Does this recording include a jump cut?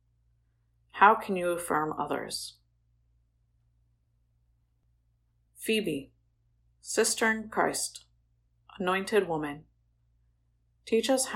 no; 0 cuts

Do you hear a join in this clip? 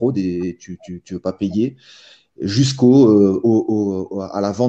no; 0 cuts

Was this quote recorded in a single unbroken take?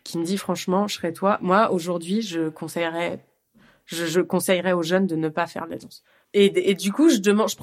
no; 1 cut; at 6.2 s

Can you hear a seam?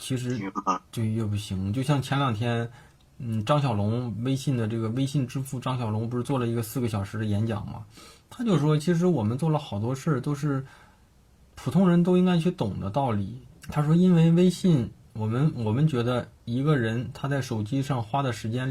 yes; 1 cut; at 13.5 s

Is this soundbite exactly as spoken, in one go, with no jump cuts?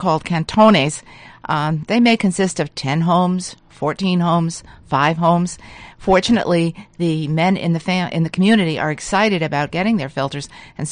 yes; 0 cuts

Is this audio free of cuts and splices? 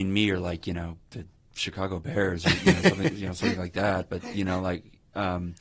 yes; 0 cuts

